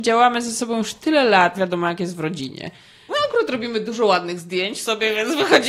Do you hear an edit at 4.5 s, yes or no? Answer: no